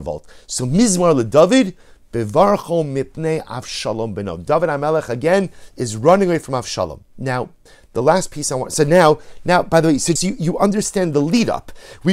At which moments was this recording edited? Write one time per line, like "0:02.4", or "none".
0:10.2

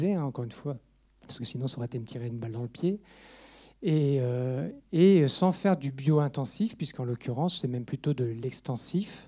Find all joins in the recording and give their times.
none

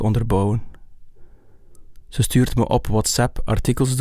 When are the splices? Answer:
none

